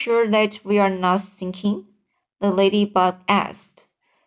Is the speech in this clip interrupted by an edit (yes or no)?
no